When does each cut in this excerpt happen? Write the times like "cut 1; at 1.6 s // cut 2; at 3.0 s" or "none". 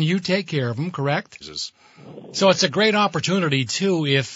cut 1; at 1.4 s